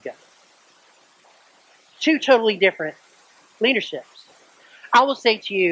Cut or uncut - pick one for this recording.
uncut